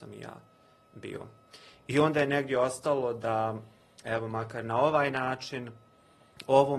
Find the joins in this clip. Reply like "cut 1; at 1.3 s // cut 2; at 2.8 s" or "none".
cut 1; at 1.7 s